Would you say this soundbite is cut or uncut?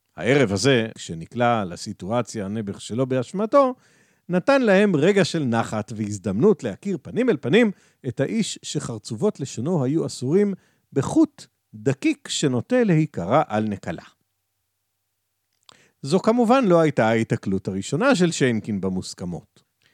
cut